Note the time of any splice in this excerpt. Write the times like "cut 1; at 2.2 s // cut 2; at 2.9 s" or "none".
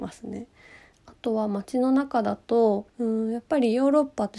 cut 1; at 0.9 s // cut 2; at 2.9 s